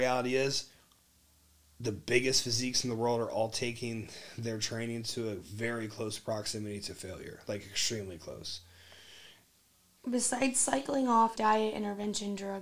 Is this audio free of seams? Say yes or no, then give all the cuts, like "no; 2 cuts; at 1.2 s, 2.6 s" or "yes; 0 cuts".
no; 2 cuts; at 10.0 s, 11.4 s